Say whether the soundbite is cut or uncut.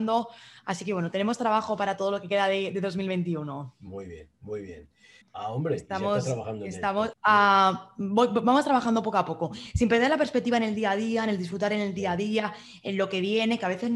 cut